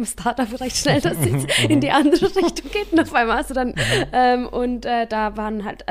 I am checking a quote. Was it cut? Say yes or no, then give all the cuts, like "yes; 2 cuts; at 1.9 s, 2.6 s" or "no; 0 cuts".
yes; 1 cut; at 3.7 s